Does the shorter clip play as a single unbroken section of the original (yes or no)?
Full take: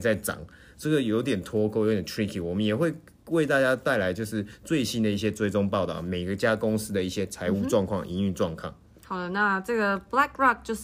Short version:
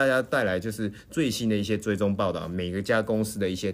yes